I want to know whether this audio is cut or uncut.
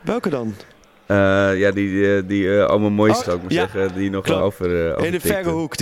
cut